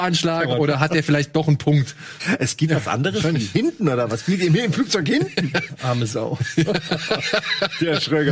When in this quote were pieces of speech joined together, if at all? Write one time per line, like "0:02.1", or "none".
0:02.2